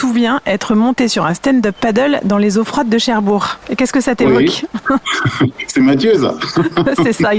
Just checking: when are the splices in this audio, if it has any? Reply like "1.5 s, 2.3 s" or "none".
3.6 s